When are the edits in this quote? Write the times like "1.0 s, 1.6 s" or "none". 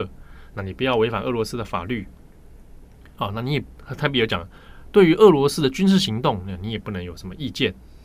none